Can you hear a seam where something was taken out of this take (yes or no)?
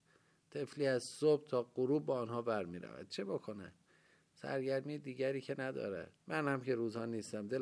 yes